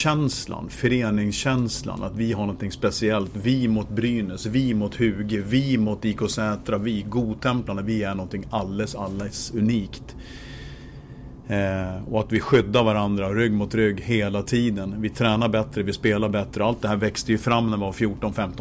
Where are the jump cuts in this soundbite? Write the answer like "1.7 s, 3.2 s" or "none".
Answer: none